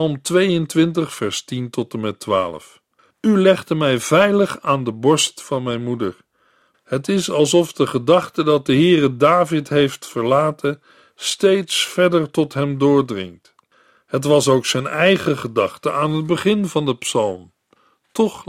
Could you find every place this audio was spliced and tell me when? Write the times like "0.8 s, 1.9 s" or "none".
3.1 s, 6.7 s